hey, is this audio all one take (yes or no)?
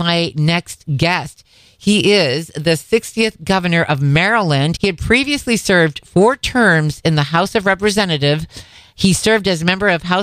no